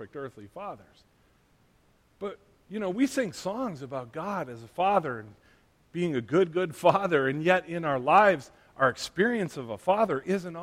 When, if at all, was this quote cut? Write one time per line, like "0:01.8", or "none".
none

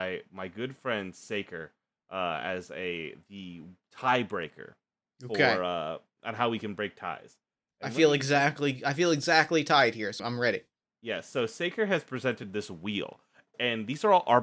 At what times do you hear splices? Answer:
0:10.2

